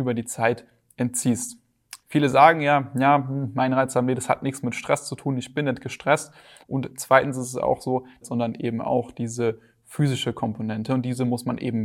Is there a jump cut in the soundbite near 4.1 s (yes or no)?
no